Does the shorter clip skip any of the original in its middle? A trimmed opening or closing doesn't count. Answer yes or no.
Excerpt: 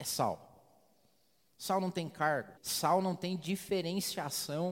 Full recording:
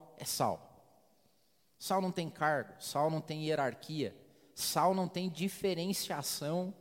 yes